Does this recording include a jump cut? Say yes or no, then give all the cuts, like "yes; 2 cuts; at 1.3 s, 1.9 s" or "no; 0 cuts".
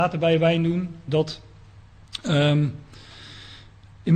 yes; 1 cut; at 1.1 s